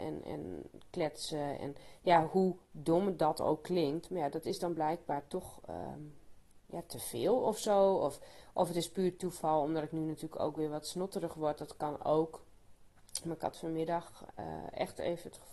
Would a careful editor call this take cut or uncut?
uncut